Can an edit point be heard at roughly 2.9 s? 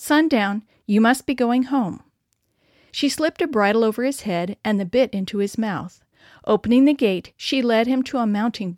yes; 1 cut; at 2.9 s

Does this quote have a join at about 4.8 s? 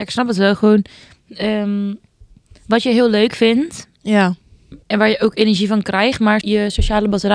yes; 2 cuts; at 4.8 s, 6.4 s

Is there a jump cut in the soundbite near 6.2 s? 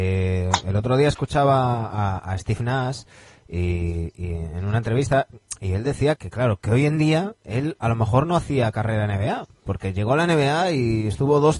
yes; 1 cut; at 6.2 s

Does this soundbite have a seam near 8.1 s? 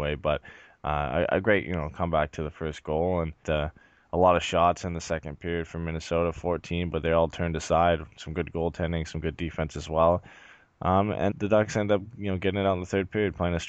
no; 2 cuts; at 3.4 s, 11.3 s

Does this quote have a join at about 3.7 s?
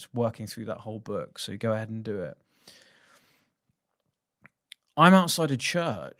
no; 0 cuts

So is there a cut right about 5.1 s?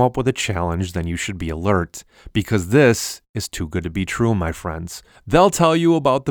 yes; 1 cut; at 5.1 s

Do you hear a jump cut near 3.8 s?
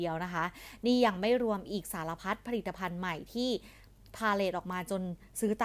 no; 0 cuts

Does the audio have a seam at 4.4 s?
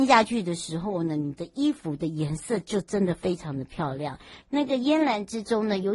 yes; 1 cut; at 4.4 s

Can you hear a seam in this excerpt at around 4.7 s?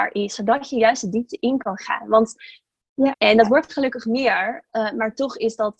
no; 1 cut; at 3.1 s

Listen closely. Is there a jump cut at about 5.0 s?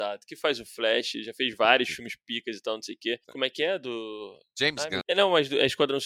yes; 2 cuts; at 3.2 s, 5.0 s

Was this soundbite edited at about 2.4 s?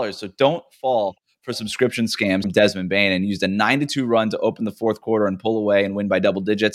yes; 1 cut; at 2.4 s

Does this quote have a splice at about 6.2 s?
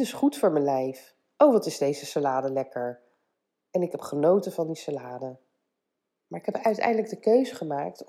yes; 1 cut; at 6.2 s

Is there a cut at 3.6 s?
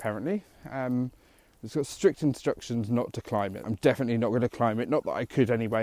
yes; 1 cut; at 3.6 s

